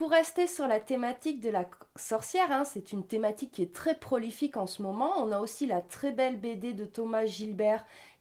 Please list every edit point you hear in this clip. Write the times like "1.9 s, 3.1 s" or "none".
none